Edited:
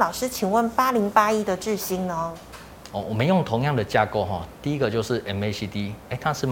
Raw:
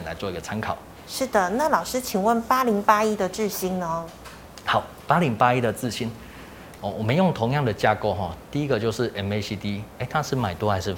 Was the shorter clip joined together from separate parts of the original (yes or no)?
yes